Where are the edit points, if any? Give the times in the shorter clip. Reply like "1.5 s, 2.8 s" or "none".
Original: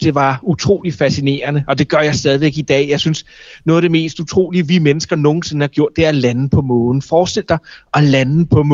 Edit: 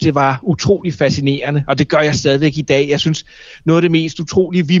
none